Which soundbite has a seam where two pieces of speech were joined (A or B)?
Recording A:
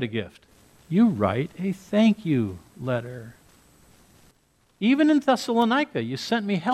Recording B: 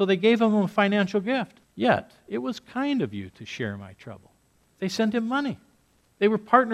B